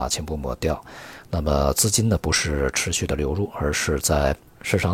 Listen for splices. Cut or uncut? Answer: uncut